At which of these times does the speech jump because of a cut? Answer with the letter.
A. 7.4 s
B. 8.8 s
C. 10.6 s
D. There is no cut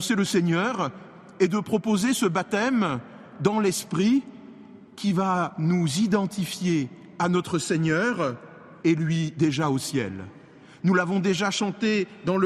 B